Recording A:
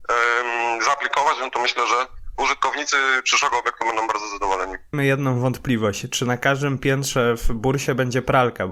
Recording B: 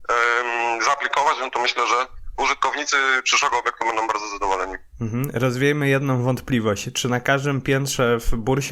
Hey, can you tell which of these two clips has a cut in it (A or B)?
A